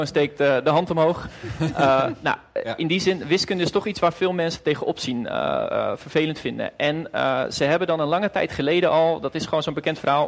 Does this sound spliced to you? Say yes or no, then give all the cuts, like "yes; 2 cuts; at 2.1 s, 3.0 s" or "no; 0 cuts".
no; 0 cuts